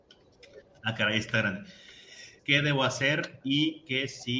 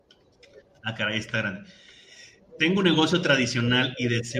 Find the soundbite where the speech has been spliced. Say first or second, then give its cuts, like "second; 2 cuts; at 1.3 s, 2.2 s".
first; 2 cuts; at 2.4 s, 3.4 s